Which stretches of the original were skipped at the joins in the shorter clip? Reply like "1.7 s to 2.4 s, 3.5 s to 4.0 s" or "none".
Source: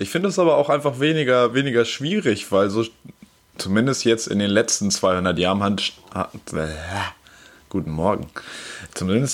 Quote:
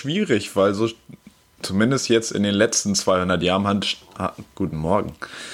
6.4 s to 7.6 s